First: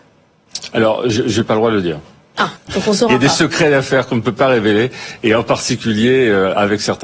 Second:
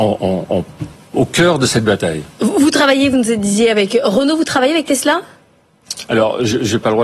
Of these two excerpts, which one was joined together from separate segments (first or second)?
first